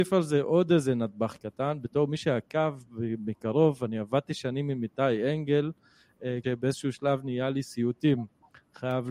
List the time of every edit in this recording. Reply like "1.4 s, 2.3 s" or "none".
6.4 s